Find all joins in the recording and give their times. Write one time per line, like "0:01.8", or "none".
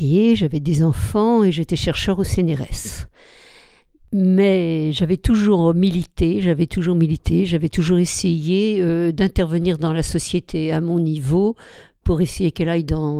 none